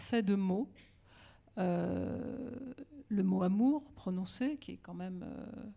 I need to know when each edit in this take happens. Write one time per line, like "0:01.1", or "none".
none